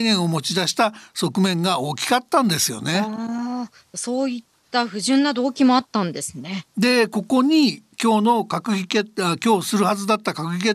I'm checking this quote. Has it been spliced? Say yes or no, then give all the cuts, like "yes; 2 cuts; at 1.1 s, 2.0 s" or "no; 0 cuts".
no; 0 cuts